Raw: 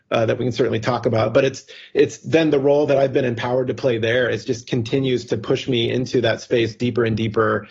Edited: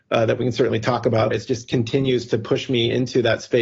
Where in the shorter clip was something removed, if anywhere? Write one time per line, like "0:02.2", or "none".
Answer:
0:01.3